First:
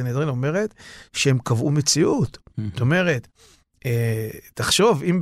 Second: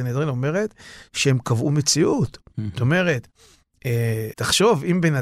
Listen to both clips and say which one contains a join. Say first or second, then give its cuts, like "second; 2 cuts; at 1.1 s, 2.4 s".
second; 1 cut; at 4.3 s